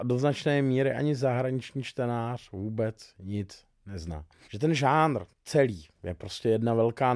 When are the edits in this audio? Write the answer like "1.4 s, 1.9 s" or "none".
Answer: none